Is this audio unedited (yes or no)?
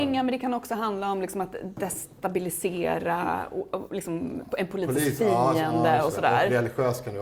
yes